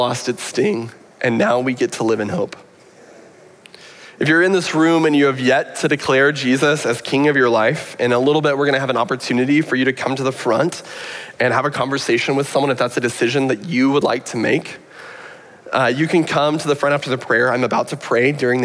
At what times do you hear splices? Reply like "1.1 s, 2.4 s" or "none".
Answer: none

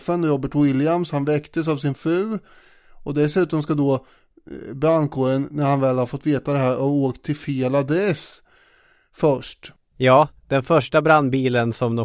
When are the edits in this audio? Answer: none

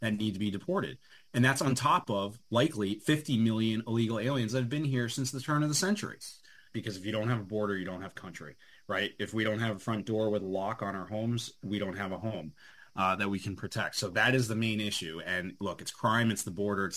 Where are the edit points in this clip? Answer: 6.7 s

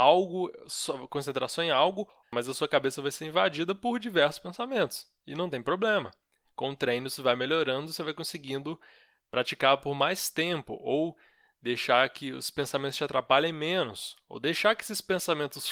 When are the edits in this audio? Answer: none

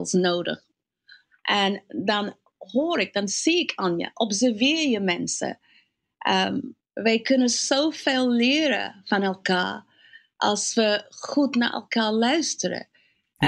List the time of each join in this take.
6.8 s

